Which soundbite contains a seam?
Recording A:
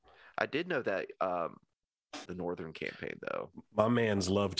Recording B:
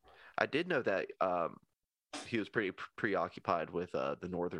A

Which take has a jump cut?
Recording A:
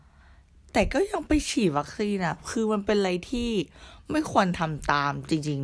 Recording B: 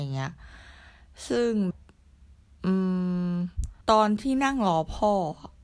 B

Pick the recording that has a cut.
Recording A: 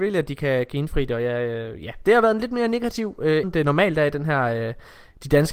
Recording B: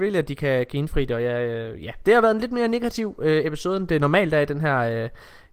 A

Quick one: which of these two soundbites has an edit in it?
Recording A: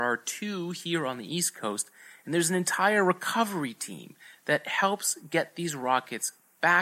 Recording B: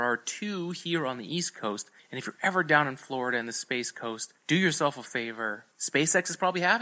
B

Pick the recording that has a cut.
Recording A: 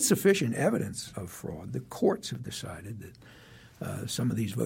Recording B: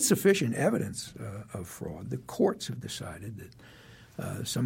A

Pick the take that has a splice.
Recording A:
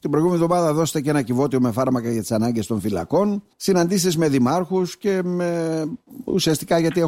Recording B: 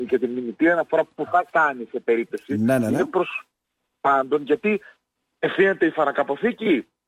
A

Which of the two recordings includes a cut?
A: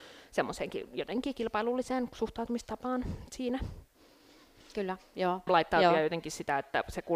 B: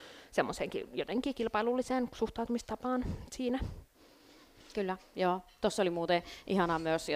A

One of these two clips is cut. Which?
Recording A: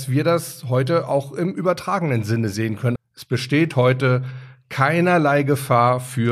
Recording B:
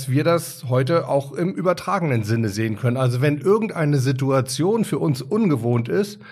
A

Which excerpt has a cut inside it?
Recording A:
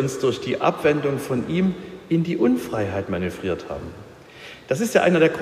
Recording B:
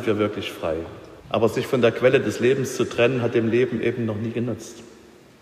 B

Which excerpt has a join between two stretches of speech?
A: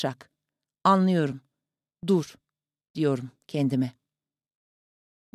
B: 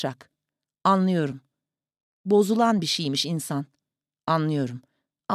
A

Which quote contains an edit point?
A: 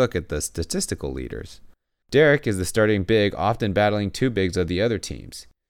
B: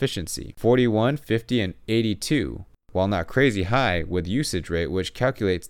A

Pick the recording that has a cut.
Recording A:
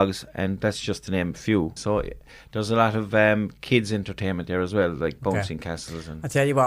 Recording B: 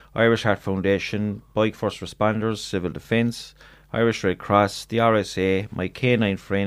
A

